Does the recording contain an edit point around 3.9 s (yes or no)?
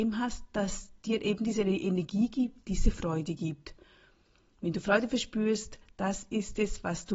no